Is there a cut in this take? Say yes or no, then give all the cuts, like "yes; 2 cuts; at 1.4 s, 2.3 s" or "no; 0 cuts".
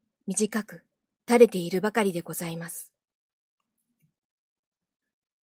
no; 0 cuts